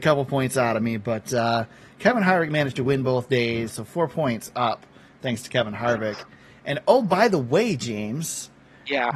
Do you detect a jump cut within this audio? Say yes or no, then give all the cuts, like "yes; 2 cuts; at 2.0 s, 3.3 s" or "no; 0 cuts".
yes; 1 cut; at 3.7 s